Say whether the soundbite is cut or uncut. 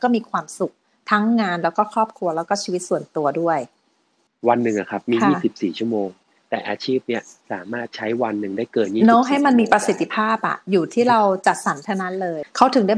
uncut